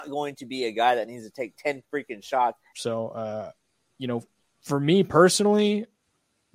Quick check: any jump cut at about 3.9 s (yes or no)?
no